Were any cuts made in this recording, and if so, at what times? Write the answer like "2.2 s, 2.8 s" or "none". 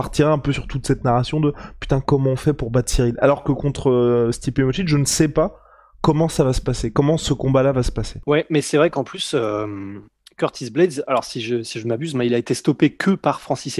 none